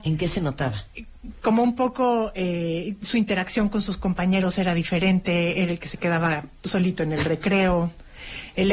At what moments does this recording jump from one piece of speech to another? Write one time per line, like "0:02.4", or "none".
none